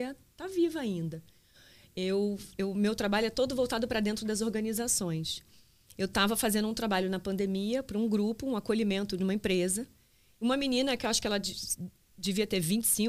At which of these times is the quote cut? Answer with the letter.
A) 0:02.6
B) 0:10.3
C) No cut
A